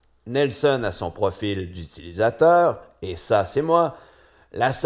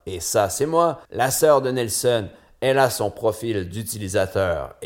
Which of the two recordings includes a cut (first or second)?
second